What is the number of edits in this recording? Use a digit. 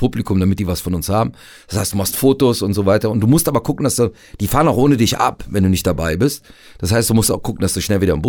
0